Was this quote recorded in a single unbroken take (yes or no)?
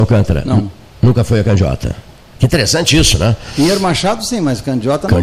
yes